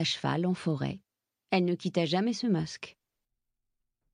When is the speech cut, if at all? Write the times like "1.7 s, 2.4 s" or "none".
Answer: 1.4 s